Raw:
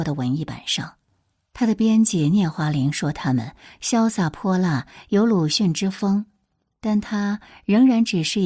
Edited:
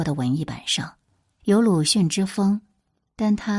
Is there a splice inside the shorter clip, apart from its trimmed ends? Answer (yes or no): yes